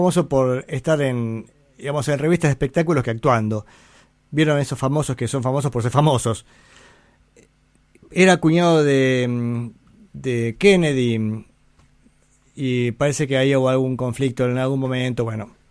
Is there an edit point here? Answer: no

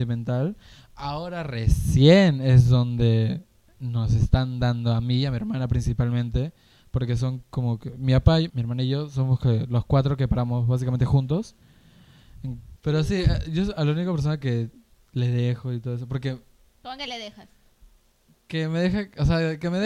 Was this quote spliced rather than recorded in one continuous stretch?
yes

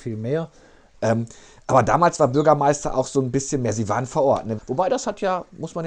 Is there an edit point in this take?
yes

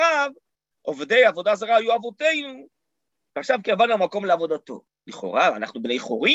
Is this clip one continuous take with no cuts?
no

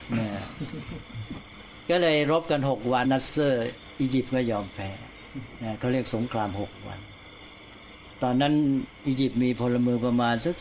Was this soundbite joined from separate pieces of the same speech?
yes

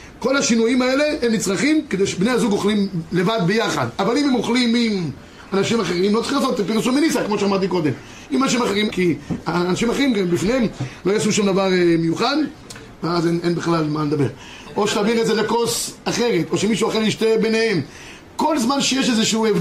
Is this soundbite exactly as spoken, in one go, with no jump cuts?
no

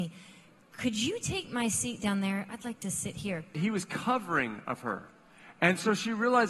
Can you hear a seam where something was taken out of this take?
yes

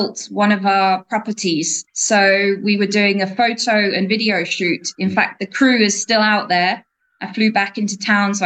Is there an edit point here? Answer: no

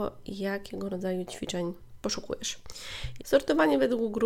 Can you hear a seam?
yes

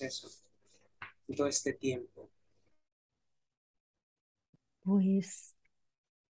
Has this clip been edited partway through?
no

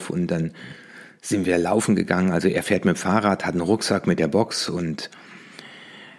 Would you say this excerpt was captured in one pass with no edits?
yes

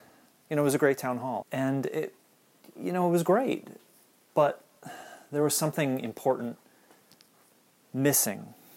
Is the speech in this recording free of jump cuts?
no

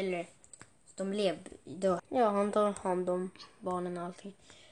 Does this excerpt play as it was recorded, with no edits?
no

